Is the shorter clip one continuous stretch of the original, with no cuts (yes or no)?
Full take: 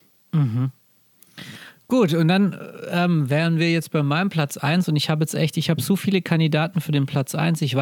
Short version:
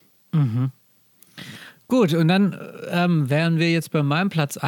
yes